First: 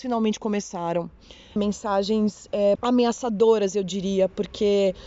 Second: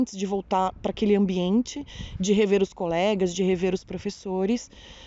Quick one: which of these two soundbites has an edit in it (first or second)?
first